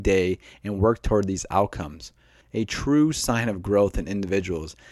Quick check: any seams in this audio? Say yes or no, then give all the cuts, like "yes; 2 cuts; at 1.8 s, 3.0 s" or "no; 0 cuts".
yes; 1 cut; at 2.4 s